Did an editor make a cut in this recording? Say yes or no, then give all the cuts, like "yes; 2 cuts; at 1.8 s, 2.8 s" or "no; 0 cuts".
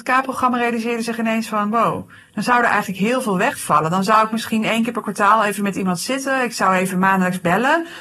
no; 0 cuts